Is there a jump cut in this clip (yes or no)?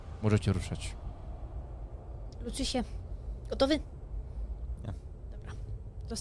yes